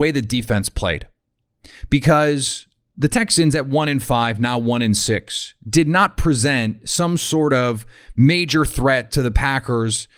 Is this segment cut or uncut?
uncut